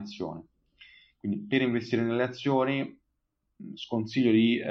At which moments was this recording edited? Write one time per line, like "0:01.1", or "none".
none